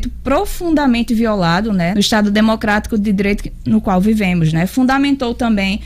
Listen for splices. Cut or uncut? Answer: cut